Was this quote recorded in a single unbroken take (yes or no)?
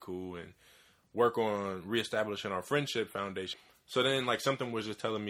no